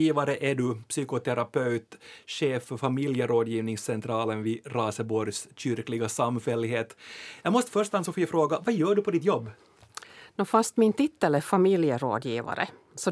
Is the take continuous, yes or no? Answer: yes